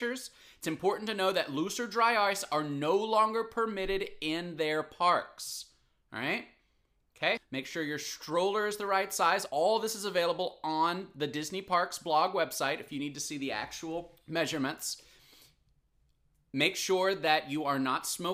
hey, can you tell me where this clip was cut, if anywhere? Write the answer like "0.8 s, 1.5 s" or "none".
7.4 s